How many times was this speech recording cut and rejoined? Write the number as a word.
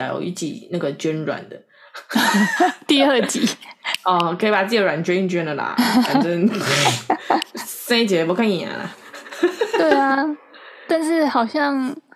zero